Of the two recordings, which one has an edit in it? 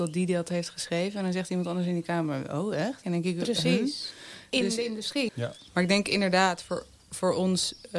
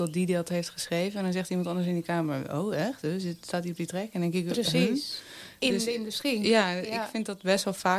first; 2 cuts; at 3.0 s, 5.3 s

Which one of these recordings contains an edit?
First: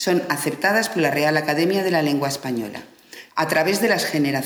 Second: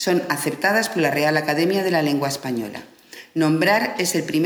first; 1 cut; at 3.3 s

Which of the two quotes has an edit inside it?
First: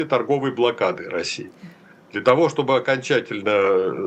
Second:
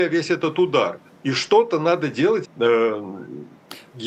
second; 2 cuts; at 1.2 s, 2.4 s

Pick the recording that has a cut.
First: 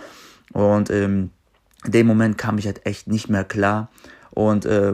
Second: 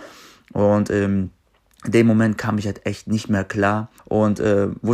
second; 1 cut; at 4.0 s

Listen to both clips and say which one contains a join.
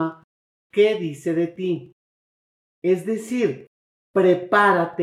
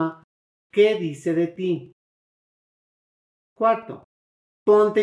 first; 1 cut; at 2.7 s

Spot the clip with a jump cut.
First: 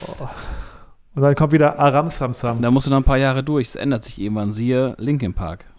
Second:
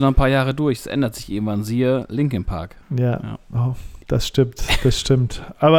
second; 1 cut; at 2.8 s

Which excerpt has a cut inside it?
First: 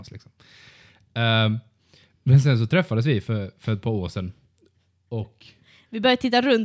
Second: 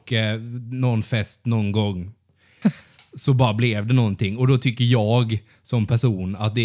second; 1 cut; at 2.6 s

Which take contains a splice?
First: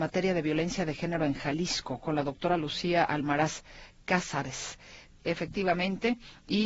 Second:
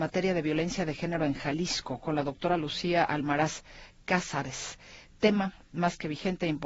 first; 1 cut; at 5.2 s

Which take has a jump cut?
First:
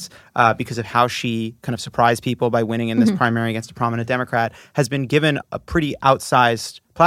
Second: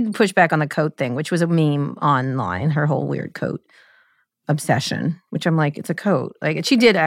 first; 1 cut; at 5.4 s

